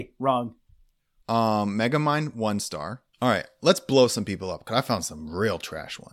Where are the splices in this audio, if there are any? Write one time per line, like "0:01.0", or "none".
0:01.2
0:03.1